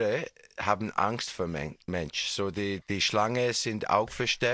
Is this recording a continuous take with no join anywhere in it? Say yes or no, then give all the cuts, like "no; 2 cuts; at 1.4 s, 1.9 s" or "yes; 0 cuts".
no; 1 cut; at 2.8 s